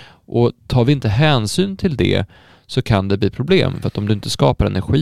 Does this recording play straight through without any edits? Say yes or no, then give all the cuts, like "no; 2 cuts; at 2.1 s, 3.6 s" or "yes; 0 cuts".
yes; 0 cuts